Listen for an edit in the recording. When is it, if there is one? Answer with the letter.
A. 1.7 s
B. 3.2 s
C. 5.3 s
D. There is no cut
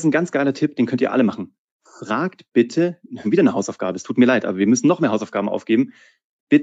B